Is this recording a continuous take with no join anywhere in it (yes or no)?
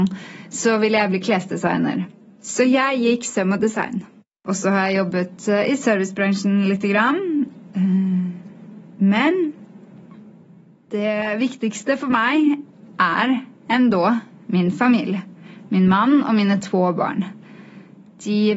yes